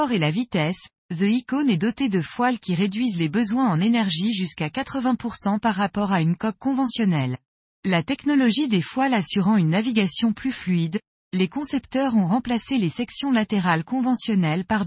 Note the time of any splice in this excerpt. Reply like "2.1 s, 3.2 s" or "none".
7.6 s